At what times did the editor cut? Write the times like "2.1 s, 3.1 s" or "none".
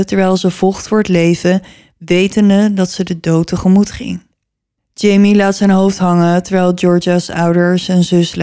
4.8 s